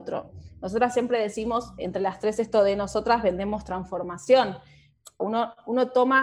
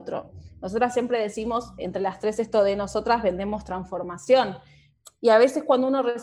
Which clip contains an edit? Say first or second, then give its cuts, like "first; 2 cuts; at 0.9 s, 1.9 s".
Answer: first; 1 cut; at 5.2 s